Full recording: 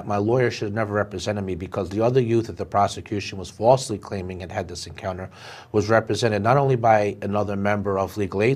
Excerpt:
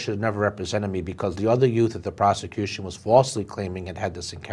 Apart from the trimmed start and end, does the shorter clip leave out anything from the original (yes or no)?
no